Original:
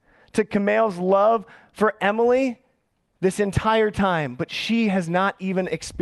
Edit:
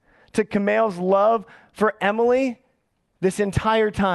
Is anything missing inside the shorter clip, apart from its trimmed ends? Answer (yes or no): no